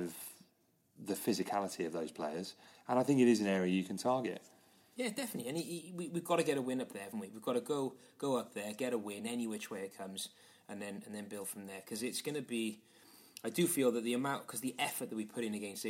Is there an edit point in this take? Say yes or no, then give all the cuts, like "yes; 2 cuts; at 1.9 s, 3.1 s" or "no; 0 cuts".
no; 0 cuts